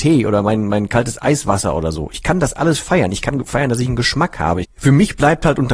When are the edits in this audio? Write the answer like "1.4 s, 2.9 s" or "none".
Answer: 4.6 s